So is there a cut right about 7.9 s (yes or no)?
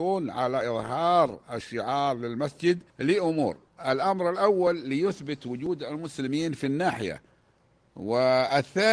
no